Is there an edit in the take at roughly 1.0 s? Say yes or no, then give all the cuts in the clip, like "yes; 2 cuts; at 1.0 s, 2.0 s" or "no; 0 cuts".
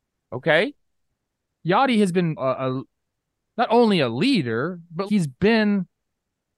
no; 2 cuts; at 2.4 s, 5.1 s